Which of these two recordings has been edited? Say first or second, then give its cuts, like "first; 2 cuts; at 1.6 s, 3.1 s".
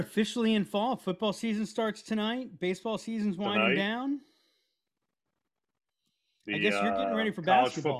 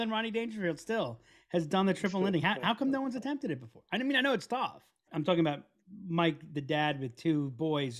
second; 1 cut; at 5.1 s